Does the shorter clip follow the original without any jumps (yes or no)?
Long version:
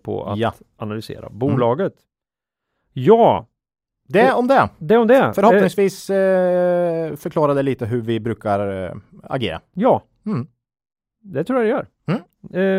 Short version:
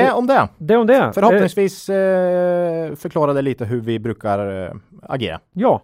yes